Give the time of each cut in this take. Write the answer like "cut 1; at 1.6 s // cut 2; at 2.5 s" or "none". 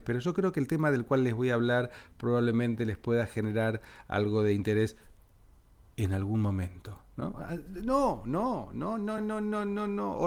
cut 1; at 9.2 s